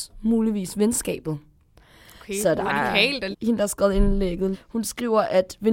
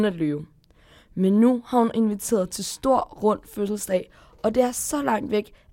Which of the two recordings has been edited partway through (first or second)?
first